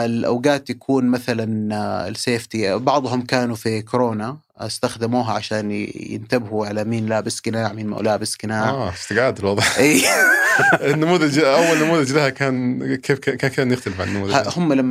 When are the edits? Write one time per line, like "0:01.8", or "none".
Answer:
none